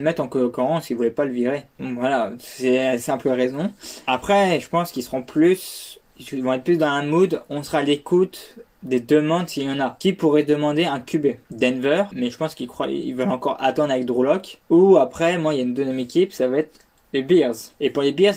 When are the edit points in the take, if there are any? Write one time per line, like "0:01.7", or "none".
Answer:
none

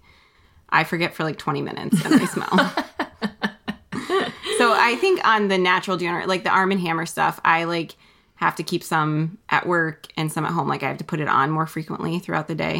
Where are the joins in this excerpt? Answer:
none

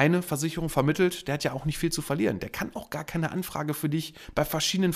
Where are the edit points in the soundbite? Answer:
none

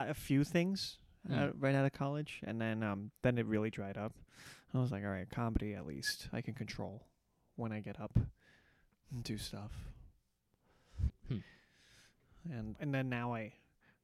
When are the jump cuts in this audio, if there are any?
0:11.1
0:12.7

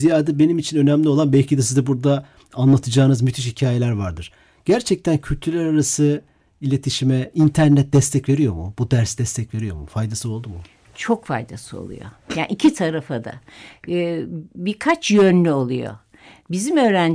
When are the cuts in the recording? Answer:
none

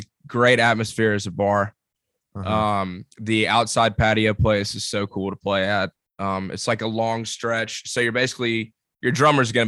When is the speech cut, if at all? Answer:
0:03.1

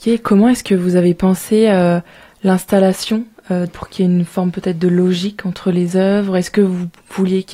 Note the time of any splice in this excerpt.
0:03.7

